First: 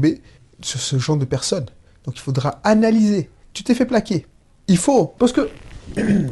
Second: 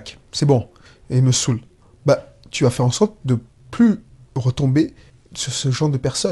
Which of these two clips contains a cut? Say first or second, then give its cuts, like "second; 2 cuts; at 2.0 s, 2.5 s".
first; 2 cuts; at 3.4 s, 5.2 s